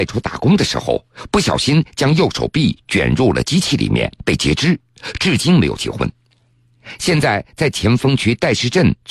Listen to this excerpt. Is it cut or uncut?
uncut